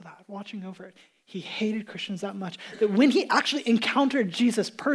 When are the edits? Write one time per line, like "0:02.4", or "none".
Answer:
none